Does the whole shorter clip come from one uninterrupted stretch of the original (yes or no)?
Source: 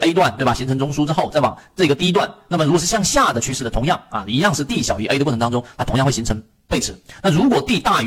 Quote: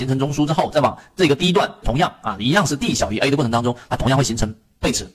no